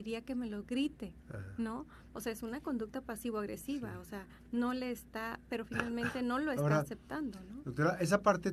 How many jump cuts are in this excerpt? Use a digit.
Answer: 1